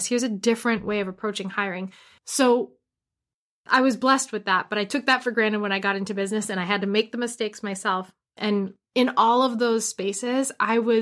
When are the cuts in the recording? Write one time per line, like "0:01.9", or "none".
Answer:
0:02.2
0:08.4